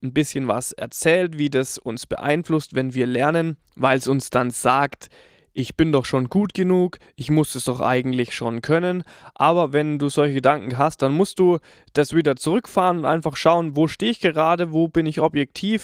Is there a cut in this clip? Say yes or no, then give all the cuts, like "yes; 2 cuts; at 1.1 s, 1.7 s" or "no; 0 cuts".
no; 0 cuts